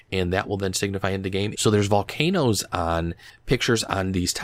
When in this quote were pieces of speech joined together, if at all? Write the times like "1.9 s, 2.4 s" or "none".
1.5 s

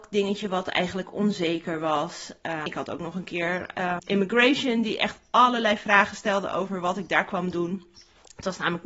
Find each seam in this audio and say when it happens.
2.7 s, 4.0 s

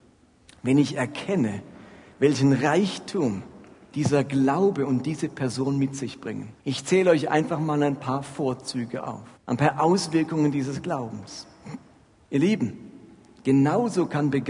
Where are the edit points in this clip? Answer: 6.6 s, 9.4 s, 12.2 s

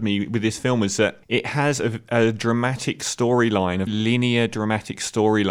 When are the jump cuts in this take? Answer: 1.2 s, 3.9 s

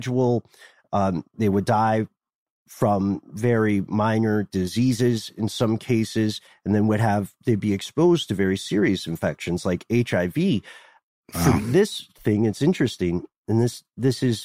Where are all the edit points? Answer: none

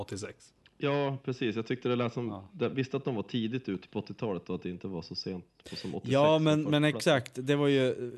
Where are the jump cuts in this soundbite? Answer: none

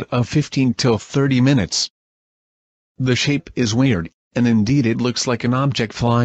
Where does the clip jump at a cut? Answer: 2.9 s

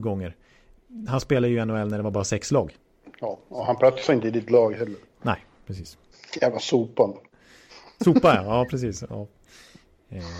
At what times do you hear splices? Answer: none

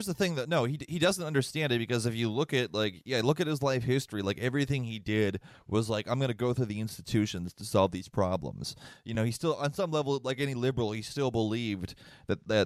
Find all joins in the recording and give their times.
none

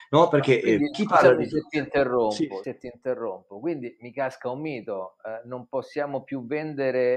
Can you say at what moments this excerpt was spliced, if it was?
2.6 s

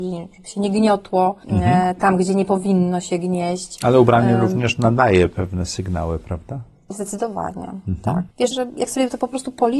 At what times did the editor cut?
8.5 s

